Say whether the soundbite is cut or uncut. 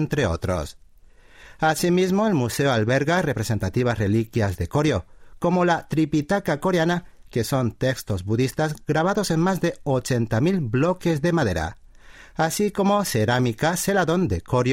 uncut